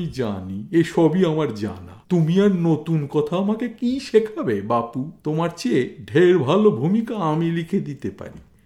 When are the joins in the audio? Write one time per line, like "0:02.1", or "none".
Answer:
0:02.0
0:05.2